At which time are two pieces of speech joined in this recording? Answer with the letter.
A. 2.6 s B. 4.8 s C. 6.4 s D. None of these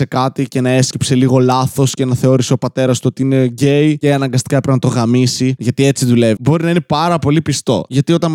C